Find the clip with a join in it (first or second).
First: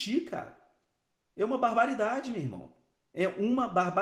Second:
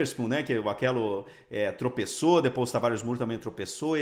first